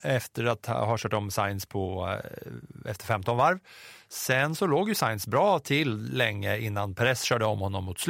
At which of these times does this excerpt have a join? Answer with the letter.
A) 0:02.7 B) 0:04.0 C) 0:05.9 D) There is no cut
D